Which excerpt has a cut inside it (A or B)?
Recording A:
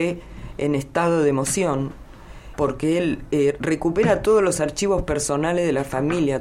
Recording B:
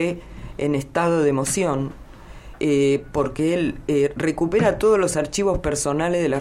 A